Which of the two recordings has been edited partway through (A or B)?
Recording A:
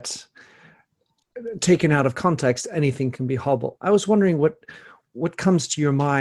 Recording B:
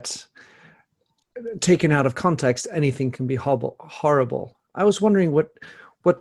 A